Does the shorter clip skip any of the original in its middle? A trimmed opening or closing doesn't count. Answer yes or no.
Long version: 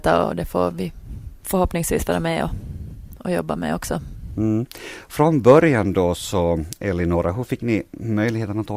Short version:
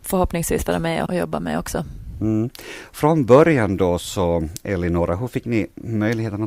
yes